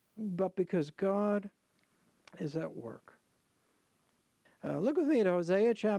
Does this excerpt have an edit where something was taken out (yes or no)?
yes